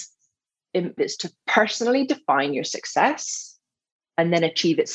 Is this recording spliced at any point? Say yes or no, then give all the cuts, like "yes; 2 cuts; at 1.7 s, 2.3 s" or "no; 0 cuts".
yes; 1 cut; at 1.0 s